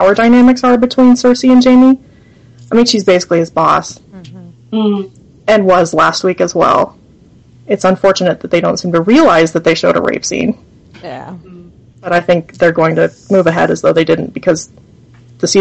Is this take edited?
yes; 1 cut; at 7.5 s

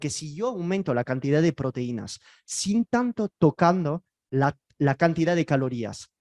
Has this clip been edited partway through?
no; 0 cuts

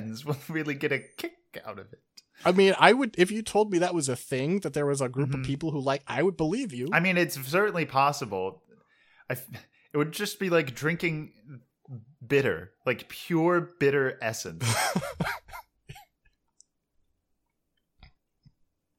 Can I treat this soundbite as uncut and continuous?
yes; 0 cuts

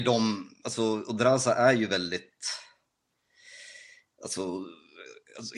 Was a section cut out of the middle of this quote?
no; 0 cuts

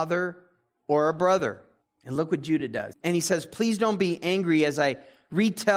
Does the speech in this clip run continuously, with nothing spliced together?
no; 2 cuts; at 1.8 s, 2.9 s

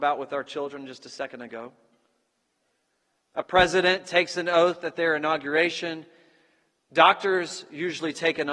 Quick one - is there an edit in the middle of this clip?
yes; 1 cut; at 3.2 s

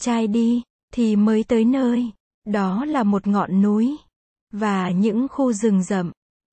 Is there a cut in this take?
no; 0 cuts

